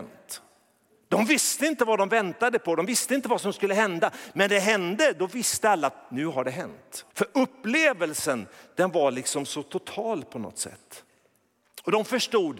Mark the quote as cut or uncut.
cut